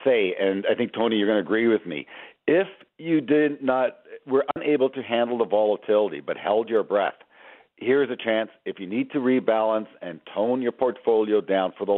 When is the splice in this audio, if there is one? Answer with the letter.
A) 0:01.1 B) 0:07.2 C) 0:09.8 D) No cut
D